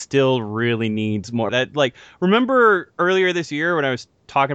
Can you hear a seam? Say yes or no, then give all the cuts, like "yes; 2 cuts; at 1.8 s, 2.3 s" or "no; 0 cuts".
yes; 1 cut; at 1.5 s